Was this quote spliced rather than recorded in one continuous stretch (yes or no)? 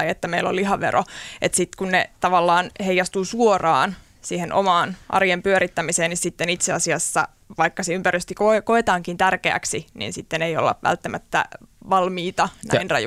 no